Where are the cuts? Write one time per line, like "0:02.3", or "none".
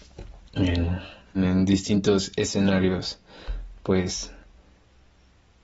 0:01.4